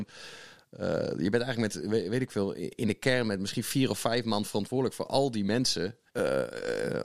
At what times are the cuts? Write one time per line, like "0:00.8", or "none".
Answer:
0:06.1